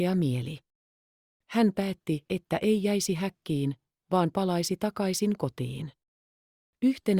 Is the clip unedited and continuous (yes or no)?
yes